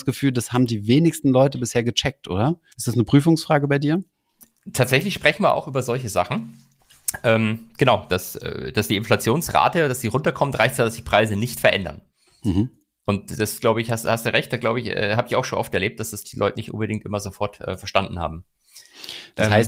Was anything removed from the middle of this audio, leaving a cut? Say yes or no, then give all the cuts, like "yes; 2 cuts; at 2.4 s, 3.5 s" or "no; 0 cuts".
yes; 2 cuts; at 2.7 s, 16.2 s